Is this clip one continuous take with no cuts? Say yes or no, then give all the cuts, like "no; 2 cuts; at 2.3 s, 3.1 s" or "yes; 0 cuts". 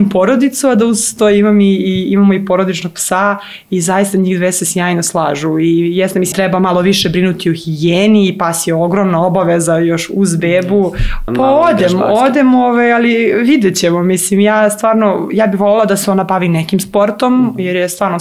no; 2 cuts; at 6.3 s, 11.3 s